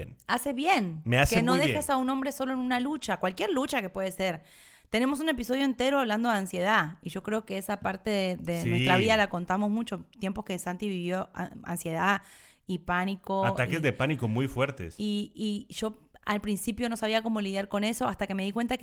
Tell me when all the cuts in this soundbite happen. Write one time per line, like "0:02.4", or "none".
none